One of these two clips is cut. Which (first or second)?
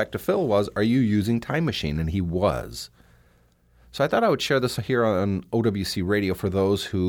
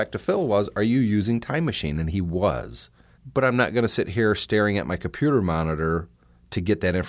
second